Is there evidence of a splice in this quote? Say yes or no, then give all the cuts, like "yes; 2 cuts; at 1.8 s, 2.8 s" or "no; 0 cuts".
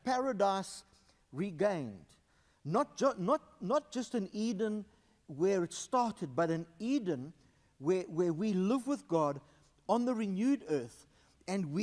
no; 0 cuts